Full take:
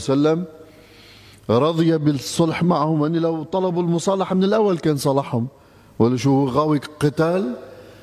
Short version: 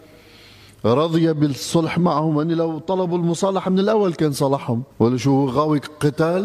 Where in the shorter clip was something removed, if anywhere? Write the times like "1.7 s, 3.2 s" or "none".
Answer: 4.9 s